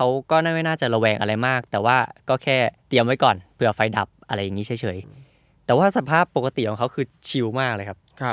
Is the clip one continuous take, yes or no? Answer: no